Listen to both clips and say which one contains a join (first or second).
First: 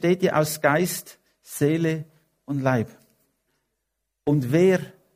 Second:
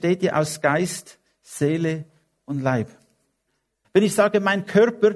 second